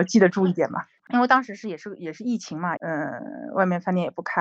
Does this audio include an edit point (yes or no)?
yes